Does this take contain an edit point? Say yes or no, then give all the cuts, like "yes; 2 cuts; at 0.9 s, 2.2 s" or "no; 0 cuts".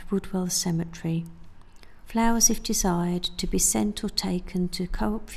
yes; 1 cut; at 2.0 s